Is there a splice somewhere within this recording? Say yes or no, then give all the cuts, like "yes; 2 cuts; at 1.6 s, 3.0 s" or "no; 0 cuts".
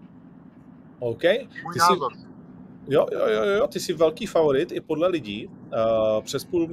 no; 0 cuts